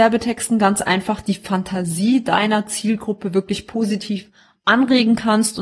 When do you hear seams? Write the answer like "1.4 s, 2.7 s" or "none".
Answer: none